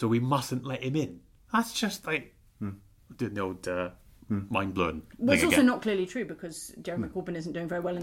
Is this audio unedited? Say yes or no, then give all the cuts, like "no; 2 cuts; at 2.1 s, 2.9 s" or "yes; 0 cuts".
yes; 0 cuts